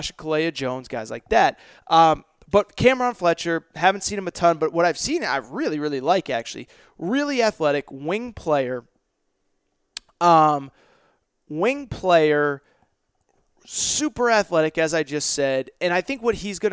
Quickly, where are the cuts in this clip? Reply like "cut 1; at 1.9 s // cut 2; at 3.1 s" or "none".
none